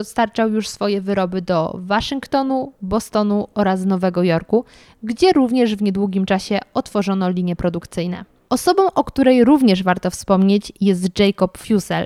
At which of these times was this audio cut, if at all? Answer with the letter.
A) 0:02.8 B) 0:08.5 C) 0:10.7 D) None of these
B